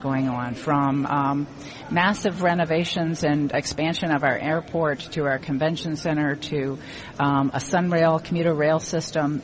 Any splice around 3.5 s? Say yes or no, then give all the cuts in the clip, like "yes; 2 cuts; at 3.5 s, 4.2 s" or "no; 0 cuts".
yes; 1 cut; at 3.5 s